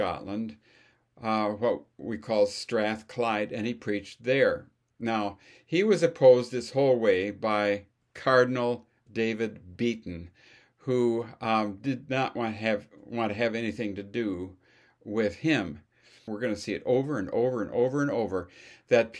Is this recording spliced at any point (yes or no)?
yes